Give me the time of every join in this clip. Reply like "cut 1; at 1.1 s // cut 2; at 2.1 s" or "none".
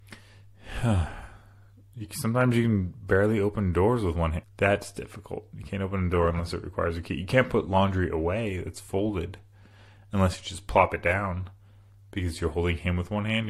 cut 1; at 4.4 s